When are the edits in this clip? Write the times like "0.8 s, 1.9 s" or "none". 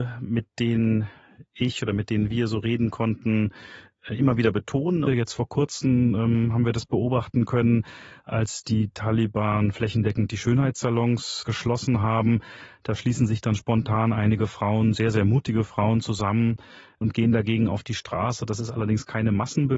5.1 s